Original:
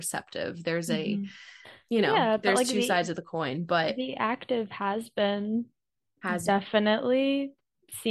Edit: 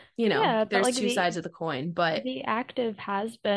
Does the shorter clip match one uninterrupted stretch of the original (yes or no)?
yes